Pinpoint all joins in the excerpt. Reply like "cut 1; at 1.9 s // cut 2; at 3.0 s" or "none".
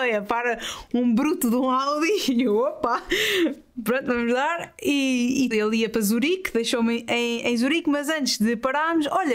cut 1; at 5.5 s